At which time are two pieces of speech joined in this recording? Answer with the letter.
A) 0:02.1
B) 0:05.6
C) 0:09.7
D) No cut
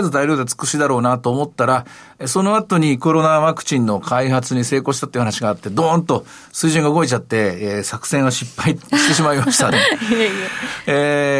C